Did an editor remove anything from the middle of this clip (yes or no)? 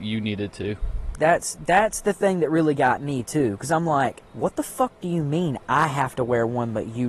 yes